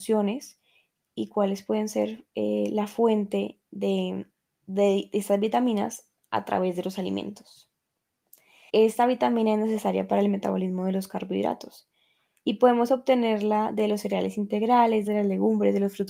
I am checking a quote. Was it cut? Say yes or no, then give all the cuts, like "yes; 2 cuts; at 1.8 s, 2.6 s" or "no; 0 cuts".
yes; 2 cuts; at 8.7 s, 15.1 s